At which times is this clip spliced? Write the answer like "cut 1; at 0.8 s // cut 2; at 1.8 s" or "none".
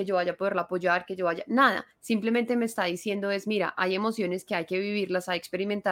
none

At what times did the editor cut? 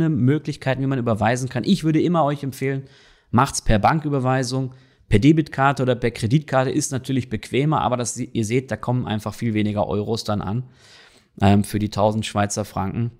none

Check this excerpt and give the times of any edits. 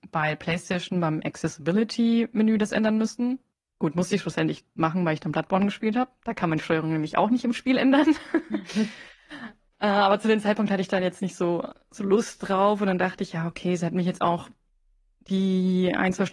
none

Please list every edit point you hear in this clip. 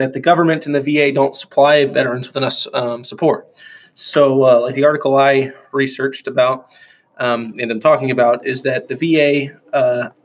none

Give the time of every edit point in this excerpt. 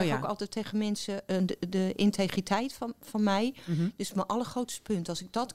none

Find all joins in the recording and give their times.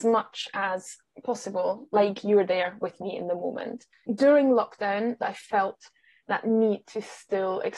cut 1; at 5.2 s

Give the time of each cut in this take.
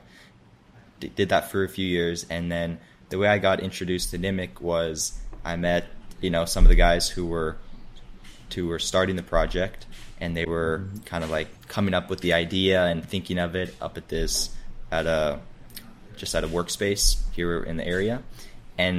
cut 1; at 11.6 s

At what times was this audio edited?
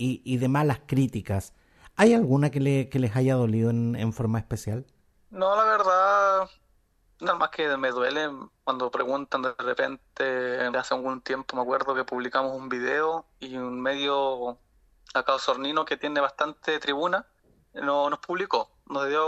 cut 1; at 7.3 s // cut 2; at 10.7 s // cut 3; at 17.6 s

